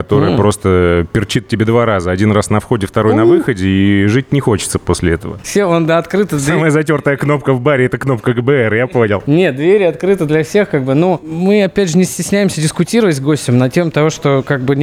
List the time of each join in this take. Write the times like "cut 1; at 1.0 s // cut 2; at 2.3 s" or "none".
cut 1; at 5.4 s